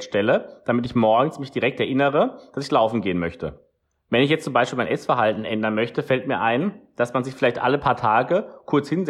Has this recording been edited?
no; 0 cuts

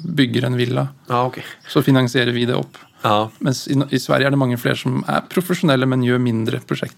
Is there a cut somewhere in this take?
no; 0 cuts

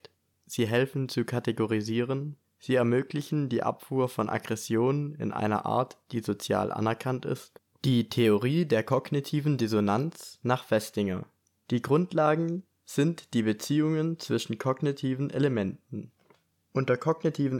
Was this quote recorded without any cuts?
no; 1 cut; at 7.7 s

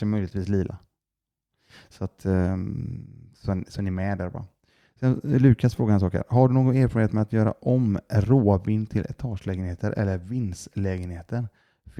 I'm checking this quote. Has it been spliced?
no; 0 cuts

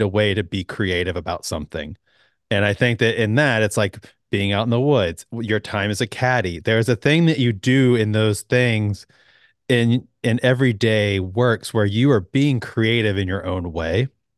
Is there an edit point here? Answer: no; 0 cuts

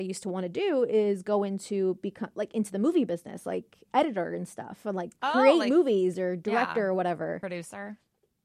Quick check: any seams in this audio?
no; 0 cuts

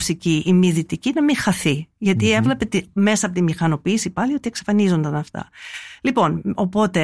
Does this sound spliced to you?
no; 0 cuts

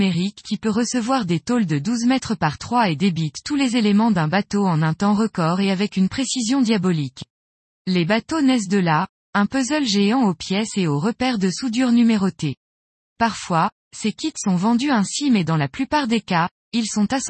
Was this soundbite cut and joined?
no; 0 cuts

